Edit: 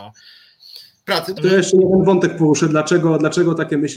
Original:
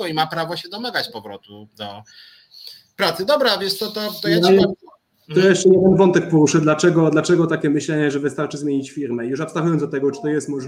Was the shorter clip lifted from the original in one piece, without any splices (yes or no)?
no